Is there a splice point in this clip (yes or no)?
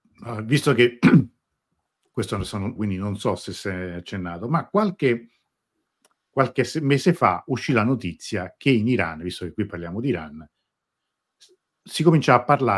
yes